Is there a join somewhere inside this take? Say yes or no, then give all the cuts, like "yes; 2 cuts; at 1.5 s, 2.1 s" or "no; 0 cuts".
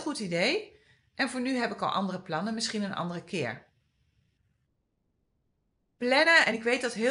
no; 0 cuts